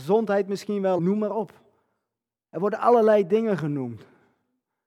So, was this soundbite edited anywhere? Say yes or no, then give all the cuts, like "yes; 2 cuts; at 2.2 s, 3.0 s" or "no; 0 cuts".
yes; 1 cut; at 1.0 s